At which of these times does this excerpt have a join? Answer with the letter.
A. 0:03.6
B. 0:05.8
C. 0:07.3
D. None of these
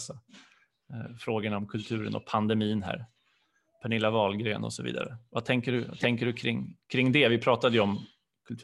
D